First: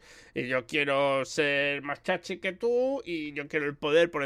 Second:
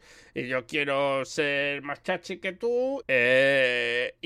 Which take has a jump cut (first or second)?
second